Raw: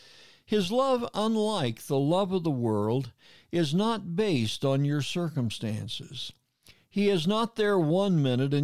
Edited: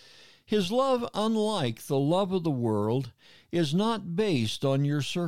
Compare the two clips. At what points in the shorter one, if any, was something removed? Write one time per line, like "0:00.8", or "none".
none